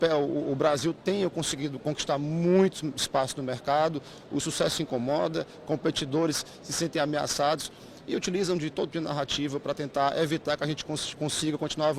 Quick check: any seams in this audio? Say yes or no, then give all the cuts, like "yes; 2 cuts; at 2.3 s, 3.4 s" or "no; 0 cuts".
yes; 1 cut; at 8.9 s